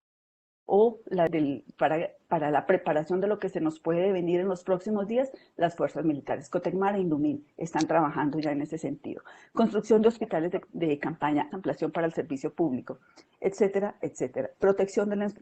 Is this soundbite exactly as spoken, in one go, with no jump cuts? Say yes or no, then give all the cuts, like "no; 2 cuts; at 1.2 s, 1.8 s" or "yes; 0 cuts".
no; 2 cuts; at 11.5 s, 14.0 s